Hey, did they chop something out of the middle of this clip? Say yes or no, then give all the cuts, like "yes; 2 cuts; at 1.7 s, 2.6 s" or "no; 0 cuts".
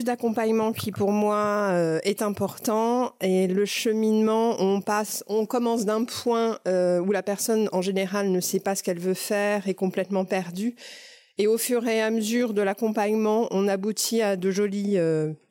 no; 0 cuts